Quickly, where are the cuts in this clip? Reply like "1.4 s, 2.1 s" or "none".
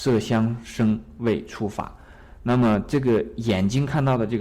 none